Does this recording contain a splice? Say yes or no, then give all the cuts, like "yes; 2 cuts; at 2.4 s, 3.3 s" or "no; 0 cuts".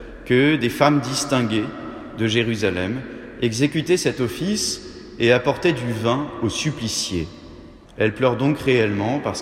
yes; 1 cut; at 7.9 s